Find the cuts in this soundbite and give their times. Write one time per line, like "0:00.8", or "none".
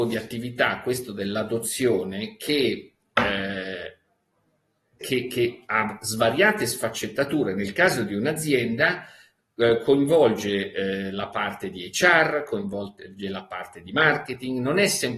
0:05.0